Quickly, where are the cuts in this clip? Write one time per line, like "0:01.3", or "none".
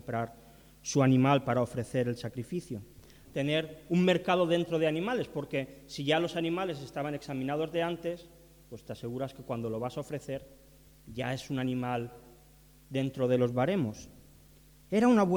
0:03.2